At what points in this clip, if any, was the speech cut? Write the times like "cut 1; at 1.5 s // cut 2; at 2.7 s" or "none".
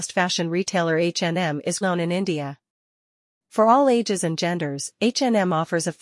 cut 1; at 1.8 s